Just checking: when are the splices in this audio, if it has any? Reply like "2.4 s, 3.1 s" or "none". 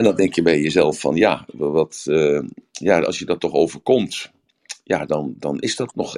none